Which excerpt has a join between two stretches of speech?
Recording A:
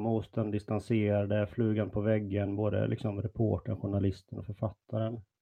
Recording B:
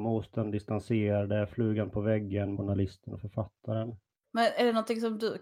B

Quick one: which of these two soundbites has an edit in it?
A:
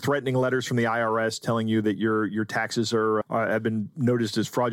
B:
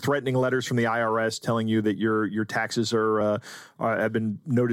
A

